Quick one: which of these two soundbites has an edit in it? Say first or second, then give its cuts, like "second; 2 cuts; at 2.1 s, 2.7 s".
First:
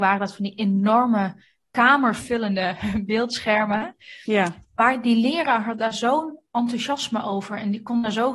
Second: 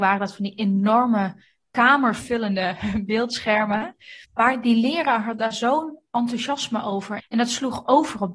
second; 2 cuts; at 4.2 s, 7.2 s